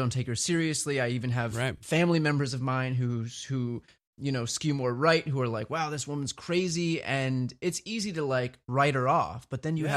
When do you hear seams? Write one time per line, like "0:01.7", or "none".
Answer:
none